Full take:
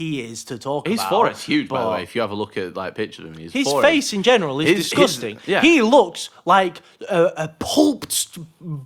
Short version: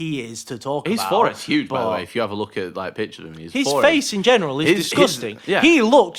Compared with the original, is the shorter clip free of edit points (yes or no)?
yes